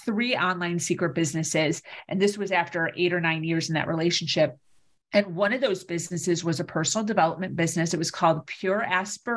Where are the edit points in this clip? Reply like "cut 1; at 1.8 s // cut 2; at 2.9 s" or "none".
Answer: none